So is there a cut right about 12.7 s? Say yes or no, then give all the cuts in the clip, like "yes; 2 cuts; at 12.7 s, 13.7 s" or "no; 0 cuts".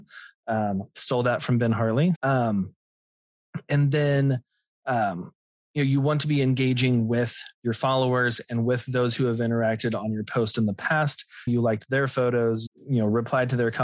yes; 3 cuts; at 2.2 s, 11.5 s, 12.7 s